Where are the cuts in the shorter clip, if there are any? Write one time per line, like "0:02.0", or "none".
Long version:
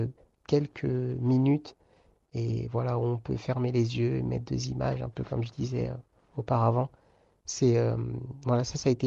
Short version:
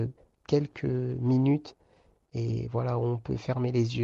none